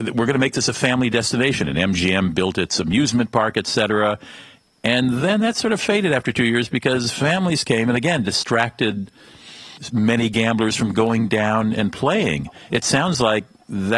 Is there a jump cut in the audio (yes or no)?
no